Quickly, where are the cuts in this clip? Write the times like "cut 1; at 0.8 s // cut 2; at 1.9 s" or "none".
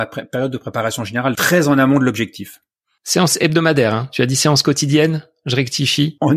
cut 1; at 1.4 s